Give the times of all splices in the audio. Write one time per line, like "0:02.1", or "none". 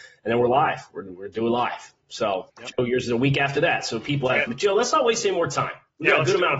0:02.5
0:04.5